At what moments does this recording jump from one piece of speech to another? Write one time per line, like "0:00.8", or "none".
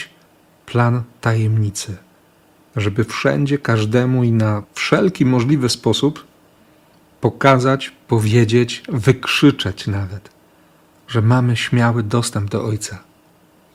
none